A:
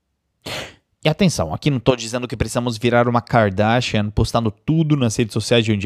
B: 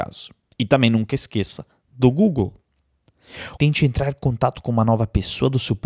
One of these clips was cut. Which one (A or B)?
B